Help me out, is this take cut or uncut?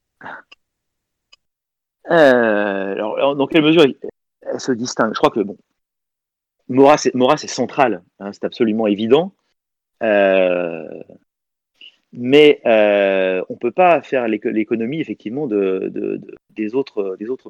uncut